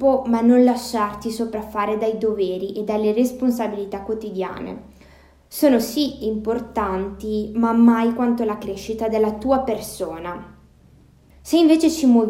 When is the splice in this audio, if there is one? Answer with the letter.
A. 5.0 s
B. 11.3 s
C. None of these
B